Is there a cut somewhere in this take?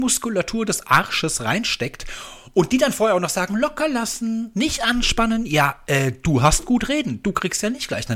no; 0 cuts

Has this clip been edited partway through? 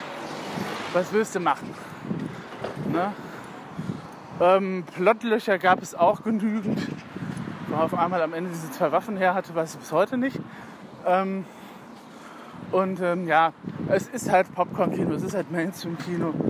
no; 0 cuts

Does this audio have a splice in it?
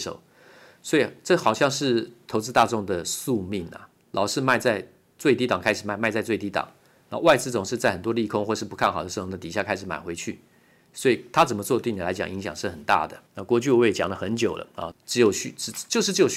yes; 2 cuts; at 13.3 s, 14.9 s

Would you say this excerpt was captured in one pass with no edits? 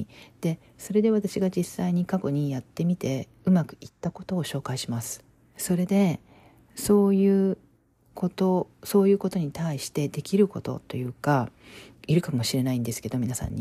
no; 2 cuts; at 5.5 s, 11.9 s

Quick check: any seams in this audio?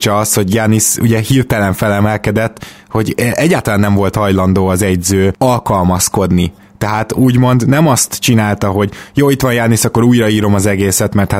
no; 0 cuts

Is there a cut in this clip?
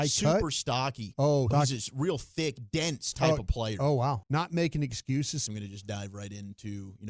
yes; 3 cuts; at 1.5 s, 4.2 s, 5.5 s

